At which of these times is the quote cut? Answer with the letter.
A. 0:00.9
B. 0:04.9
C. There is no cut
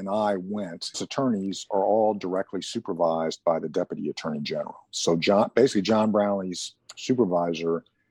A